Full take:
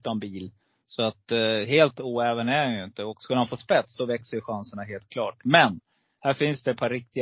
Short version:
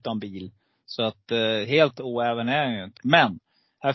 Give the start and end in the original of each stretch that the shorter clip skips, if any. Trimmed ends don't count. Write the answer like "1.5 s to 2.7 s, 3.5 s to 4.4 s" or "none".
3.0 s to 5.4 s